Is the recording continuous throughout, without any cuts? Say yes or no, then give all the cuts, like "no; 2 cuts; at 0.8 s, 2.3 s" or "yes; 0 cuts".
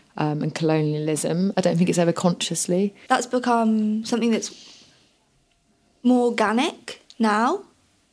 no; 2 cuts; at 1.5 s, 3.1 s